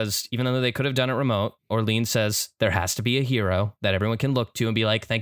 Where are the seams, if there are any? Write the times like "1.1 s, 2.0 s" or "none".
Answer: 1.6 s